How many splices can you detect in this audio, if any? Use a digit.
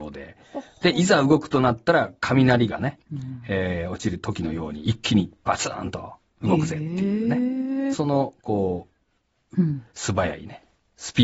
2